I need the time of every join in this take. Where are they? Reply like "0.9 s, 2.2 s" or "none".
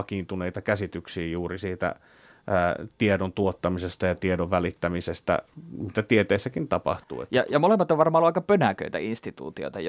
none